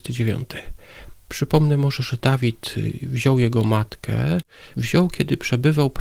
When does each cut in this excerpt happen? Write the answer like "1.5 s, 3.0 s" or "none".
1.1 s, 4.7 s